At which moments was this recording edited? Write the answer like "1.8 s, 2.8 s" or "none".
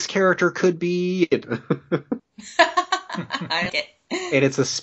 2.2 s, 3.7 s